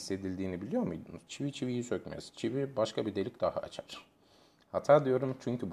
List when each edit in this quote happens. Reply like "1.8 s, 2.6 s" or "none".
1.3 s